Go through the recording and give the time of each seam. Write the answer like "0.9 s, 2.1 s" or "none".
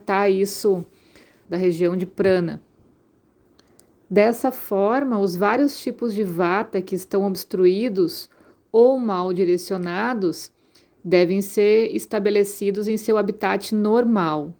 1.5 s